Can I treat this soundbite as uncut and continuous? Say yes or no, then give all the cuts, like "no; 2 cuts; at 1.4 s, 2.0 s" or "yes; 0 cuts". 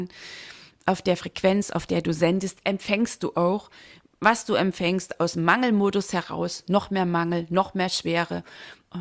yes; 0 cuts